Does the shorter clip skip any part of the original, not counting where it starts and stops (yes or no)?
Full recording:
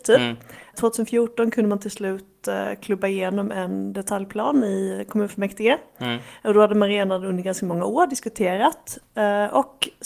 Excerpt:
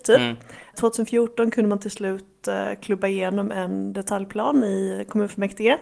no